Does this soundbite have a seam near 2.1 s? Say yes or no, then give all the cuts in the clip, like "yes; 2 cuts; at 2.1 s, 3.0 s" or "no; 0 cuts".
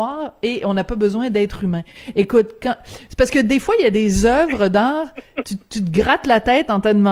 no; 0 cuts